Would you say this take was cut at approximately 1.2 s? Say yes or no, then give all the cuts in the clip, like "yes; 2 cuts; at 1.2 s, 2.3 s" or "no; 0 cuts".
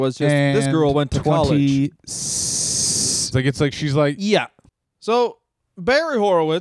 no; 2 cuts; at 3.3 s, 4.8 s